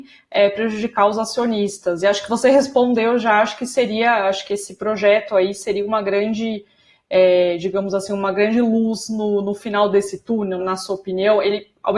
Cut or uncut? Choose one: cut